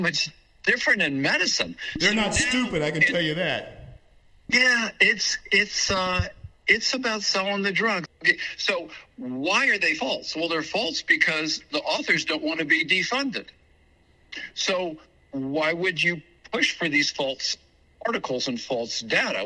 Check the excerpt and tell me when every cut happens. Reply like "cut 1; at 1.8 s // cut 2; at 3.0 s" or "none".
cut 1; at 4.4 s // cut 2; at 8.0 s